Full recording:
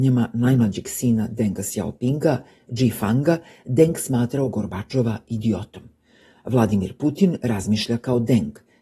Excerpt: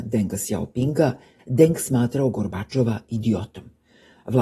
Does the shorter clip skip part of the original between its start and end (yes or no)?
yes